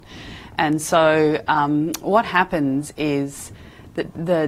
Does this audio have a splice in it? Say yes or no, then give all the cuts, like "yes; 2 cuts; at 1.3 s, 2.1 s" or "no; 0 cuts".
no; 0 cuts